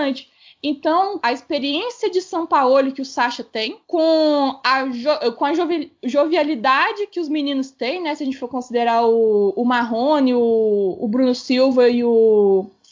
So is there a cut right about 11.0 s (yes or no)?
no